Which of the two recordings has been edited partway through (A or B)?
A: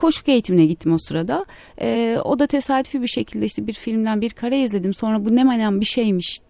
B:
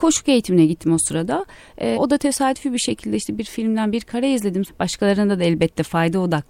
B